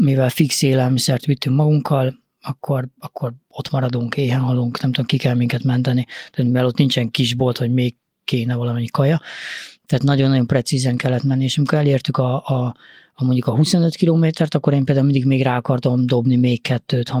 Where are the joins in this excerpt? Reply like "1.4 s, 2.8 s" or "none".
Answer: none